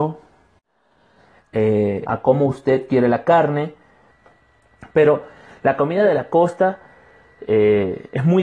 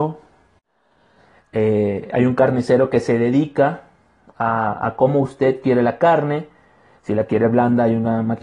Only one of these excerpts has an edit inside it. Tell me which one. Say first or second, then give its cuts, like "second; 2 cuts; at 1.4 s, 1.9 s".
first; 2 cuts; at 2.1 s, 4.1 s